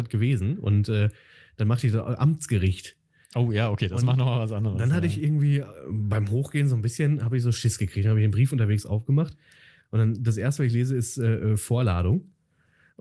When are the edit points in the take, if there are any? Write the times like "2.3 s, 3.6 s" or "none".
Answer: none